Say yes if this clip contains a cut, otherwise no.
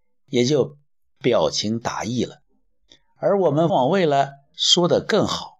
yes